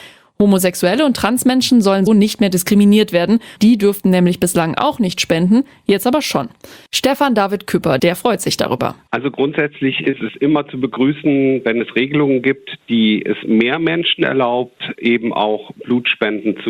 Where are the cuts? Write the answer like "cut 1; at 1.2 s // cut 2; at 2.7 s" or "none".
cut 1; at 2.1 s // cut 2; at 3.6 s // cut 3; at 8.0 s